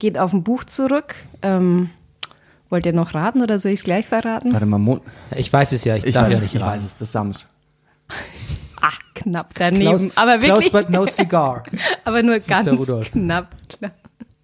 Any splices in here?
no; 0 cuts

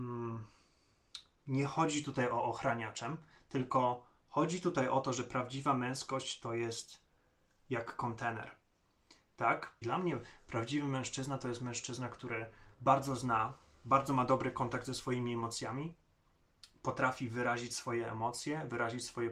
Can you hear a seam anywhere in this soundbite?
yes; 2 cuts; at 9.8 s, 12.7 s

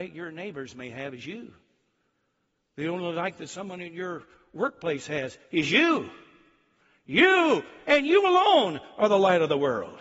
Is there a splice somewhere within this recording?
no; 0 cuts

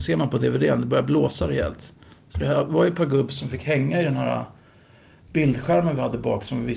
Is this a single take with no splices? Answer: yes; 0 cuts

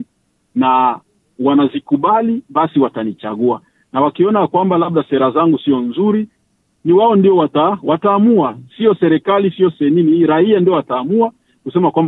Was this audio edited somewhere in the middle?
no; 0 cuts

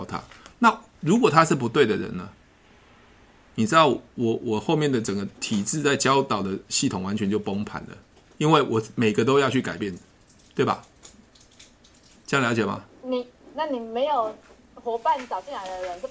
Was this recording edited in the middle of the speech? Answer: yes; 1 cut; at 5.4 s

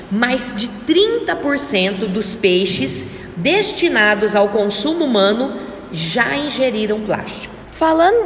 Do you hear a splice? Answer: no; 0 cuts

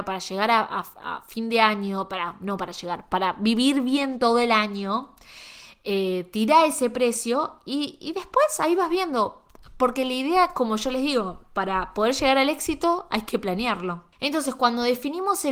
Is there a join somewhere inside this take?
yes; 1 cut; at 14.1 s

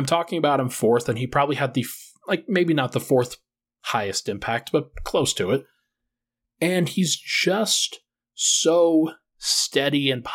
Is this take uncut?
yes; 0 cuts

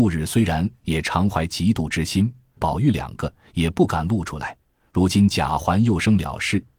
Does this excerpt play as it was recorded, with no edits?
no; 1 cut; at 2.6 s

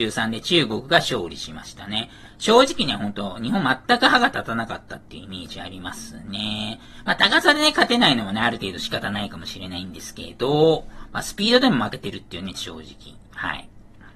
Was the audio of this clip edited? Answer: yes; 1 cut; at 12.5 s

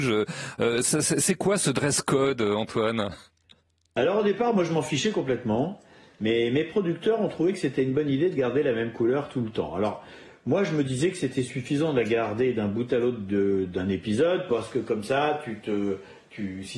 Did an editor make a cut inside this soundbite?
no; 0 cuts

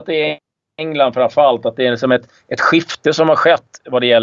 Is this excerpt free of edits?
yes; 0 cuts

